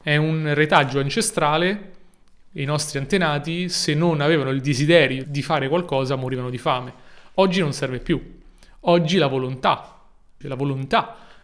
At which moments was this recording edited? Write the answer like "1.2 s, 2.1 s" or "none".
5.2 s, 10.4 s